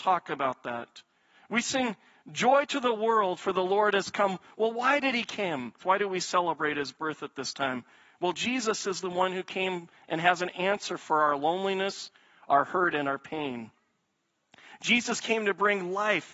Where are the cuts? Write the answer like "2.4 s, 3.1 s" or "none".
5.8 s